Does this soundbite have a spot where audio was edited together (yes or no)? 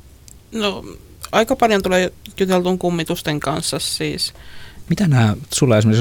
yes